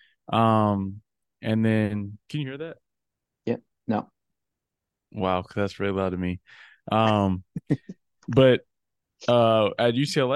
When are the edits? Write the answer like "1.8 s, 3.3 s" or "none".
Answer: none